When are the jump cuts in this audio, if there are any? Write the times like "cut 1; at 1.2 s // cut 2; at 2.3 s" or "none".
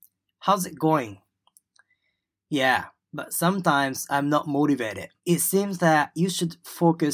cut 1; at 5.2 s